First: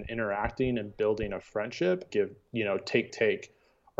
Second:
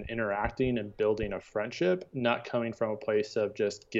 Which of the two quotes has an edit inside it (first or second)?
first